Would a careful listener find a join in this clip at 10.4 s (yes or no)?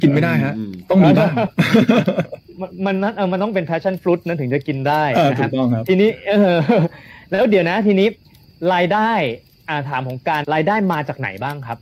yes